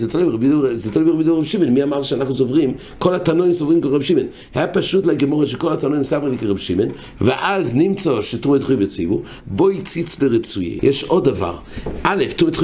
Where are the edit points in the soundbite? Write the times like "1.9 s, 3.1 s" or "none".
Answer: 9.4 s, 10.8 s

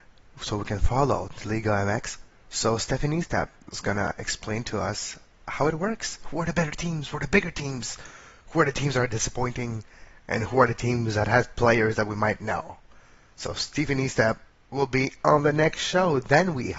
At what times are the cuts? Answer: none

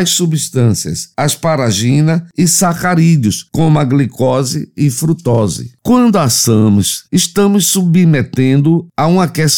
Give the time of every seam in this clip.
7.0 s

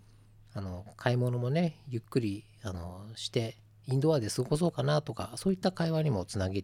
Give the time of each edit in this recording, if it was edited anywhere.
none

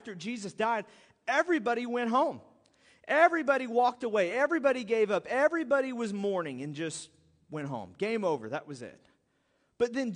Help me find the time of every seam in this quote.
none

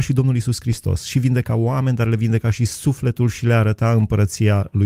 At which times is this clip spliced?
none

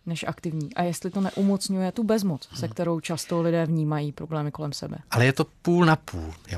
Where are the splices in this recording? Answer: 5.0 s

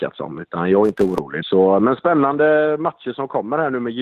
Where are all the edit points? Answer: 1.4 s

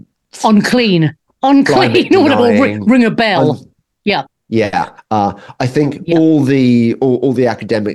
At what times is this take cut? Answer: 5.0 s

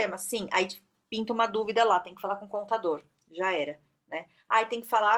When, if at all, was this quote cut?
none

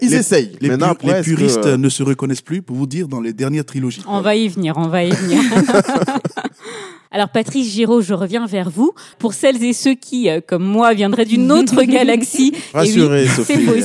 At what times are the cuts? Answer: 12.7 s

